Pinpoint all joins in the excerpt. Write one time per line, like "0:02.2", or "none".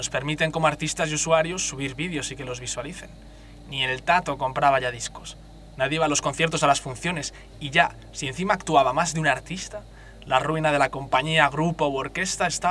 none